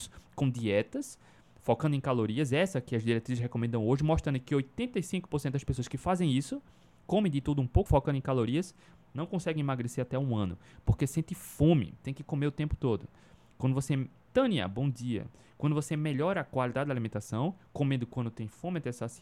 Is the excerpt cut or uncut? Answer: cut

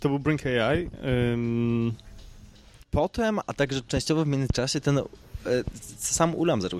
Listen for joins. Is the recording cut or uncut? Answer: cut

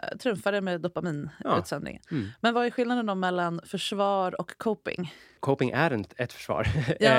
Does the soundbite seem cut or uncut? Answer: uncut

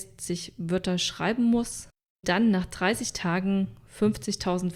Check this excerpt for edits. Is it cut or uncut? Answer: cut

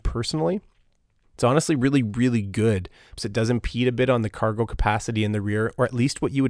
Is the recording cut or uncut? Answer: cut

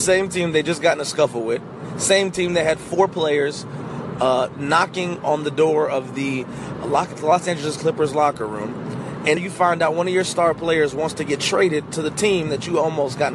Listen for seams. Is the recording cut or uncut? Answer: cut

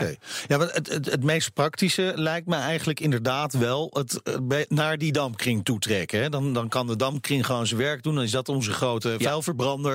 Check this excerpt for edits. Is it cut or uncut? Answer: uncut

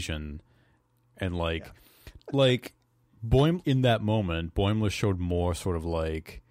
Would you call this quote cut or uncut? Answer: cut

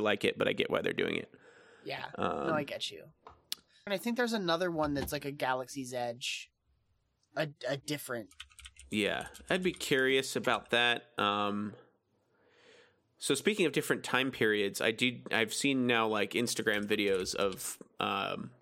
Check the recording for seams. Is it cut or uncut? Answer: cut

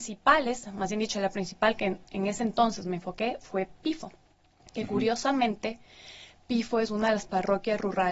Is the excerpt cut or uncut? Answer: uncut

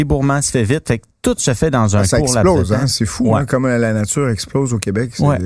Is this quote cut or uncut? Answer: uncut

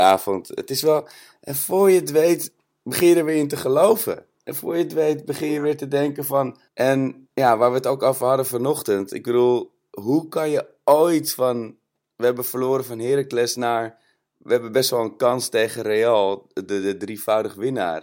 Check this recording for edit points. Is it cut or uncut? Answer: cut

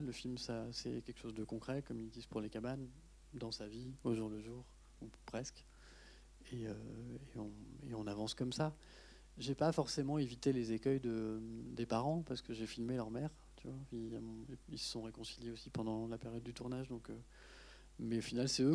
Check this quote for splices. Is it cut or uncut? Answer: uncut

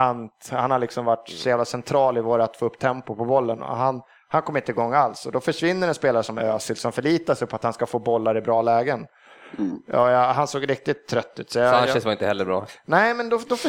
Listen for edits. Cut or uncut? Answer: uncut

